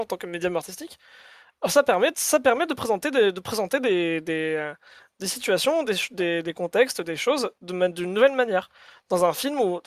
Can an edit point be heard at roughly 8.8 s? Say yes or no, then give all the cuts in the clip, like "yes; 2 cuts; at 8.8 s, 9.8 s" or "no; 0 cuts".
no; 0 cuts